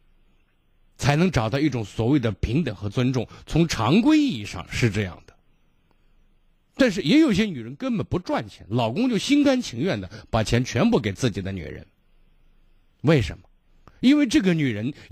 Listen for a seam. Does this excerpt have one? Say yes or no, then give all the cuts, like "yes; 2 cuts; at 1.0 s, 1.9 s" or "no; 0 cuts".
no; 0 cuts